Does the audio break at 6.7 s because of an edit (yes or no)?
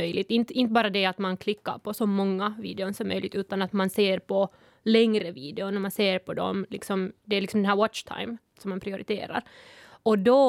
no